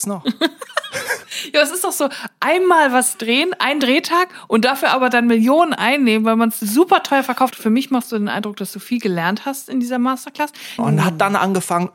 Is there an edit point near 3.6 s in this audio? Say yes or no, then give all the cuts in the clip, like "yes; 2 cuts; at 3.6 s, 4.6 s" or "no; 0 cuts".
no; 2 cuts; at 7.5 s, 10.8 s